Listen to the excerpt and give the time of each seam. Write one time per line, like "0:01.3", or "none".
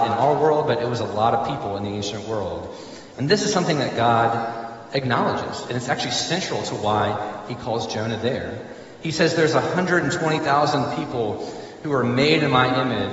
0:03.1